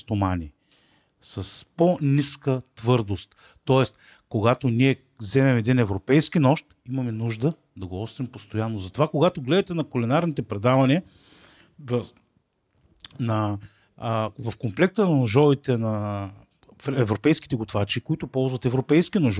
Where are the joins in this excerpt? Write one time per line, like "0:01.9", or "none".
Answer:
none